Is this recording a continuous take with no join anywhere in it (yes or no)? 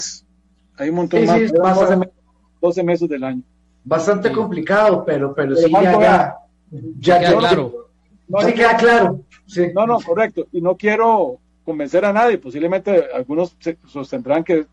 no